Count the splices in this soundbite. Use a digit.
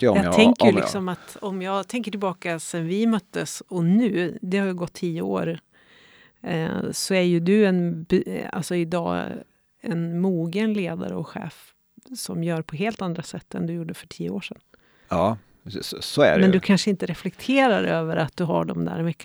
0